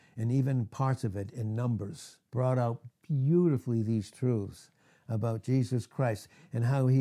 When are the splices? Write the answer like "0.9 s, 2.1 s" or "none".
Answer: 2.3 s

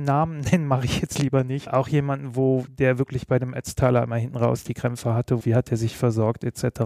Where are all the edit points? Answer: 1.7 s, 5.4 s

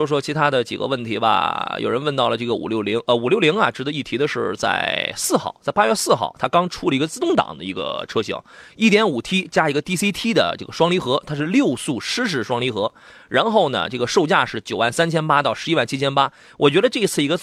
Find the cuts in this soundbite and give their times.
none

